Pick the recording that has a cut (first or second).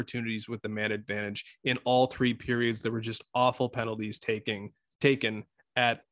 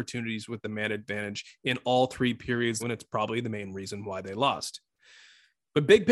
second